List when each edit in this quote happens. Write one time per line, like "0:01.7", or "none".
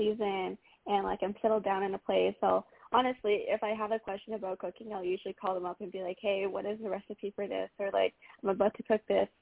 none